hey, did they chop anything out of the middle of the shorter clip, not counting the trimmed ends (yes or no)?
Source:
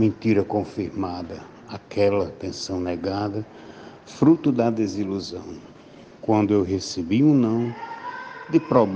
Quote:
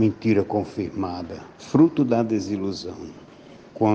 yes